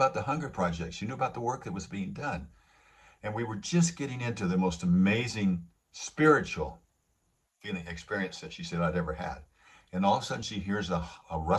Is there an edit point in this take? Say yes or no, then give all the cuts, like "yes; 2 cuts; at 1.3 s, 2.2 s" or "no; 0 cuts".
no; 0 cuts